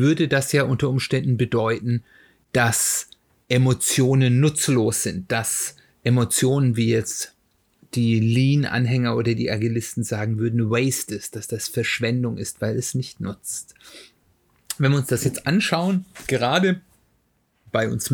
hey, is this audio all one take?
yes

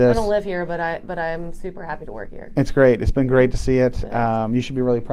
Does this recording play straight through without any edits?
yes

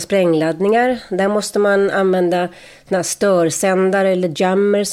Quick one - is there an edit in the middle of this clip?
no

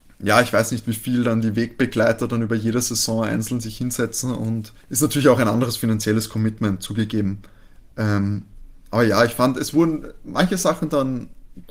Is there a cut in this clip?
yes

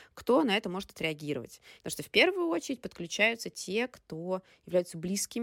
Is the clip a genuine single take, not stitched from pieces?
no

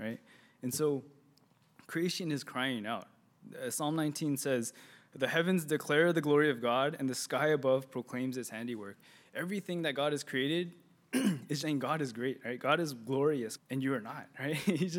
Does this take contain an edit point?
yes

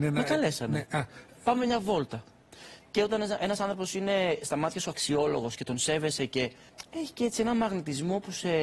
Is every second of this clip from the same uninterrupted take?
yes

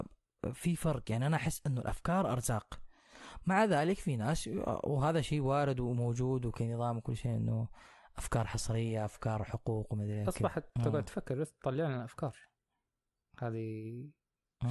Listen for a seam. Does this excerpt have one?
yes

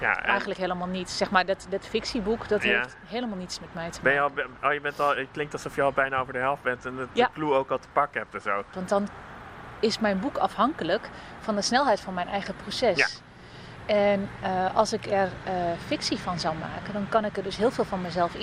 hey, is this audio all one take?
no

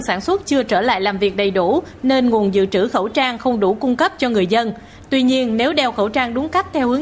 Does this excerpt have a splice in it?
yes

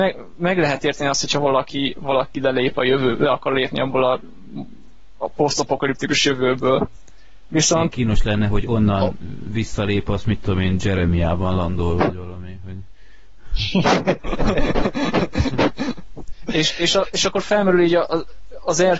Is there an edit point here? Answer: no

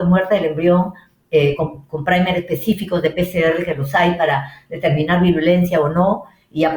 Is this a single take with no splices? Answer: yes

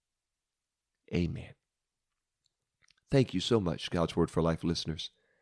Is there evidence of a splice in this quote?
no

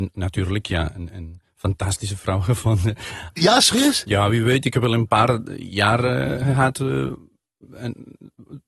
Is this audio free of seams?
no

